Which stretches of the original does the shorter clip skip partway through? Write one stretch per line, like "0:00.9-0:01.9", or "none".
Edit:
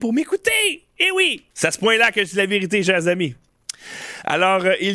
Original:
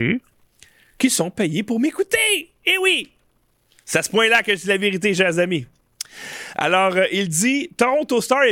0:03.2-0:03.8